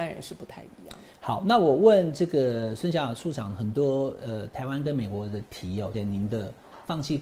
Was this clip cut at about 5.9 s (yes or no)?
yes